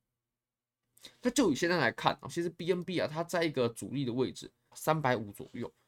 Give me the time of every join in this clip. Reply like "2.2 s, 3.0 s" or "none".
2.2 s, 4.7 s